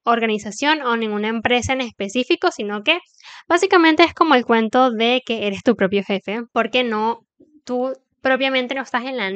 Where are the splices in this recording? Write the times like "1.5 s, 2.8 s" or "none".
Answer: none